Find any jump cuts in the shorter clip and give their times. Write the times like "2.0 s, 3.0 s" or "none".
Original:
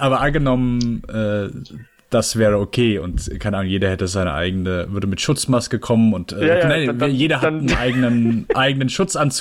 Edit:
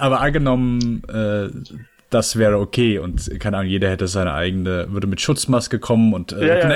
none